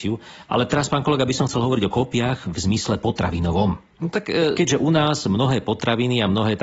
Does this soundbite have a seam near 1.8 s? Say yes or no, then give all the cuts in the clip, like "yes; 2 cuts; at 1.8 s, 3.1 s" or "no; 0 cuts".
no; 1 cut; at 3.9 s